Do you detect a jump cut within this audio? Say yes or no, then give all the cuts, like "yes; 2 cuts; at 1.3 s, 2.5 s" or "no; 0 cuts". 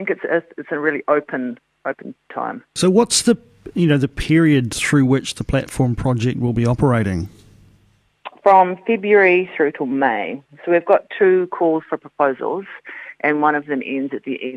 no; 0 cuts